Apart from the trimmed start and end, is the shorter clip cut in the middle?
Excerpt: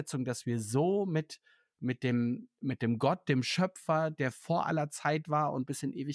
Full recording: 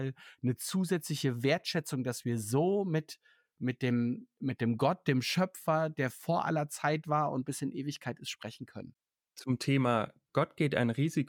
no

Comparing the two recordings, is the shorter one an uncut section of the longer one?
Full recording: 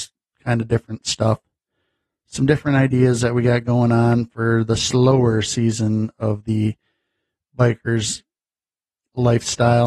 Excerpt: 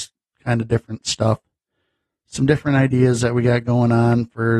yes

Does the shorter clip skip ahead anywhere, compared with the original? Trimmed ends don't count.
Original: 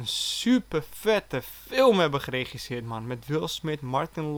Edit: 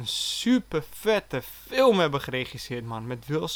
no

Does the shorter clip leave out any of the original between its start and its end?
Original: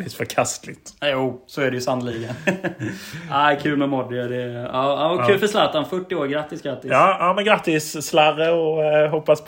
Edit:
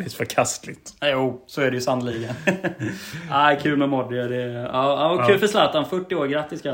no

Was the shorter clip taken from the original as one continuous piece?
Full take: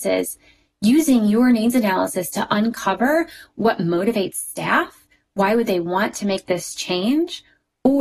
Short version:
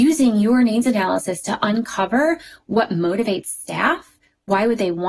yes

